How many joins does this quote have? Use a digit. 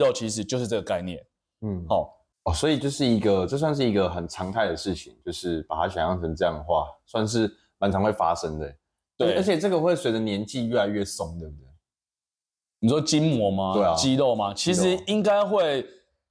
0